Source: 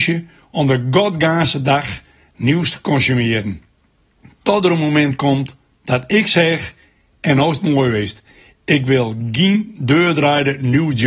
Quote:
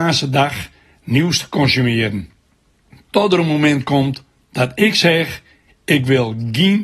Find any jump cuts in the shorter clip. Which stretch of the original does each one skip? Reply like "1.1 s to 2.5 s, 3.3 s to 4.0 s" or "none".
7.0 s to 8.5 s